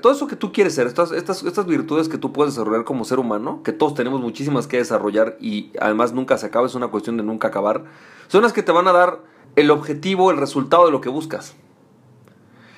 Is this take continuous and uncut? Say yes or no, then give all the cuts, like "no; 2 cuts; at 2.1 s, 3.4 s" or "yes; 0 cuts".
no; 1 cut; at 9.4 s